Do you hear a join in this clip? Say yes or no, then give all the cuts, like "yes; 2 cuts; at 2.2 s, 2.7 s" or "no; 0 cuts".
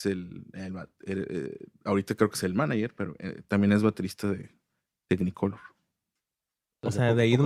no; 0 cuts